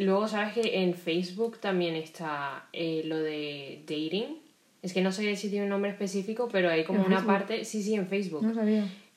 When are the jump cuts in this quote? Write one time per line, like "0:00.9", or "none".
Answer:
none